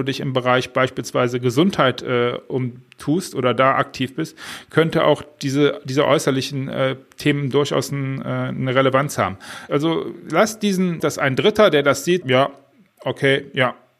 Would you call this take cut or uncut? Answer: cut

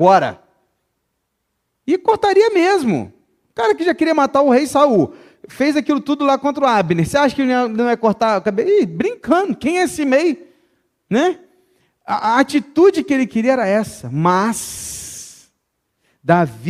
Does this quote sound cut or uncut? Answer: uncut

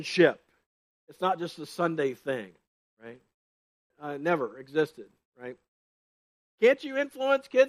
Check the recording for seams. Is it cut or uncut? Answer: cut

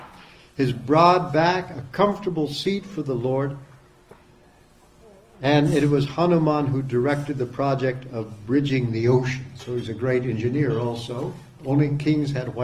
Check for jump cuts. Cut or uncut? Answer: cut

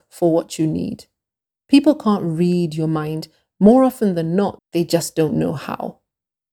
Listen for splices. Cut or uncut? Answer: cut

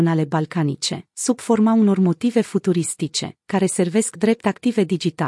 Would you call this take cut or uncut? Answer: uncut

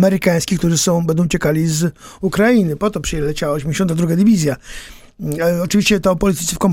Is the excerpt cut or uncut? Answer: uncut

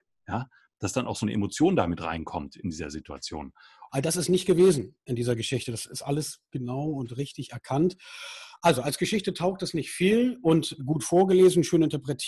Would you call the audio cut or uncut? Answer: cut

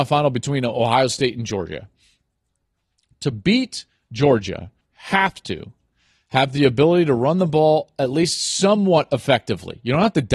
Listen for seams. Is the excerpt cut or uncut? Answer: cut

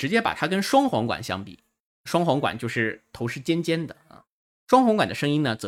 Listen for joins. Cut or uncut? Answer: uncut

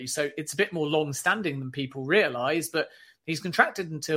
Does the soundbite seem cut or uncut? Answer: uncut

